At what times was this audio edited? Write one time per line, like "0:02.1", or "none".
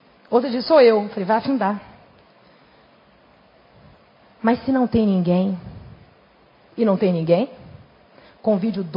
none